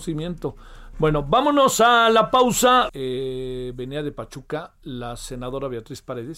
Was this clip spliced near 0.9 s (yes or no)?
yes